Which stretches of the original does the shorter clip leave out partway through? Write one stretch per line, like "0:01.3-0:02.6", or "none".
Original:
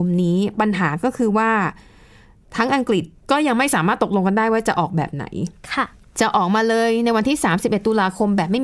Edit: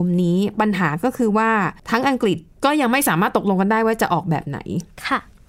0:01.8-0:02.5